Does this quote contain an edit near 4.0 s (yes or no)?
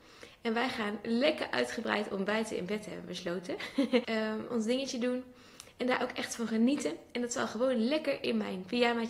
yes